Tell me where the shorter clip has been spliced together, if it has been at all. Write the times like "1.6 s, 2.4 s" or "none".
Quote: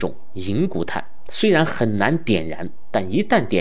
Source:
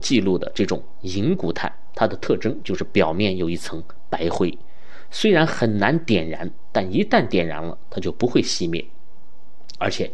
1.3 s